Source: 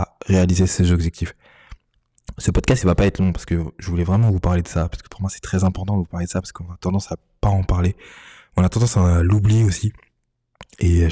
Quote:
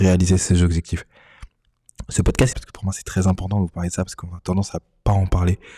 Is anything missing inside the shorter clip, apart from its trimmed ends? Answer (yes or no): yes